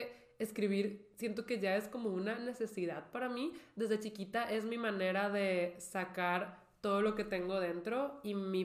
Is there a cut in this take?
no; 0 cuts

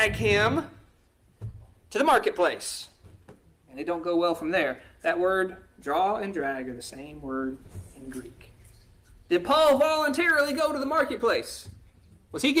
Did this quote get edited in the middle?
no; 0 cuts

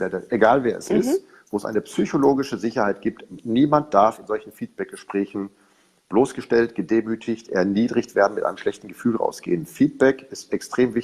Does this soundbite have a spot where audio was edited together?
no; 0 cuts

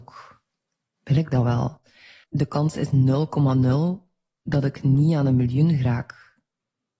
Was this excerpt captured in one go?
no; 1 cut; at 2.2 s

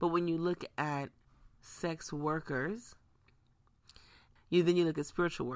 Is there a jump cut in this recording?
yes; 1 cut; at 4.4 s

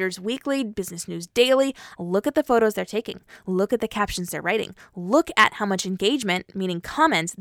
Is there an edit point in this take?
yes; 1 cut; at 1.9 s

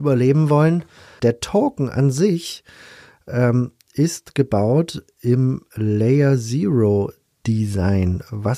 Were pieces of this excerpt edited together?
yes; 1 cut; at 1.2 s

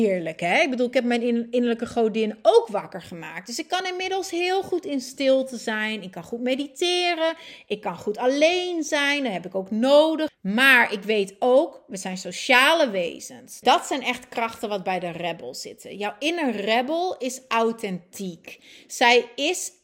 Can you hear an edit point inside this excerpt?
yes; 2 cuts; at 10.3 s, 13.6 s

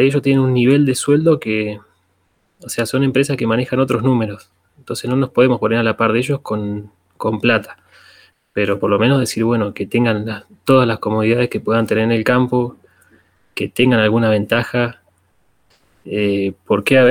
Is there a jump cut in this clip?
no; 0 cuts

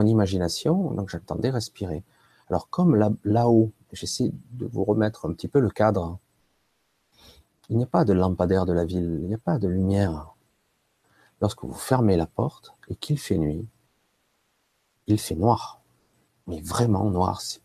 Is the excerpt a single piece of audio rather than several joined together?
yes; 0 cuts

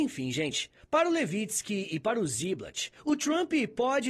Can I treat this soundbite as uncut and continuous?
yes; 0 cuts

